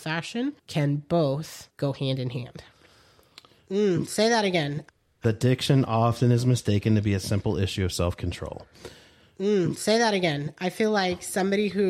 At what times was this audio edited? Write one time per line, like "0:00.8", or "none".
0:03.6